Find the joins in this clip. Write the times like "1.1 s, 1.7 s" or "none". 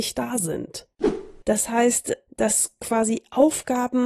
1.4 s